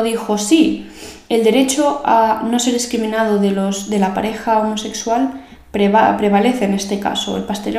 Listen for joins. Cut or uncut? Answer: uncut